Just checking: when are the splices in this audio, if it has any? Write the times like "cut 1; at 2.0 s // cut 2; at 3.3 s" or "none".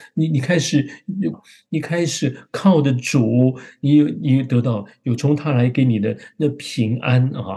cut 1; at 1.3 s // cut 2; at 5.2 s